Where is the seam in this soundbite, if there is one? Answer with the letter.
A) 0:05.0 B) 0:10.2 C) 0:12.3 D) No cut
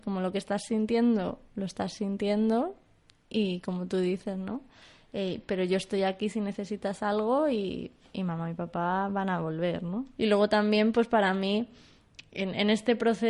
B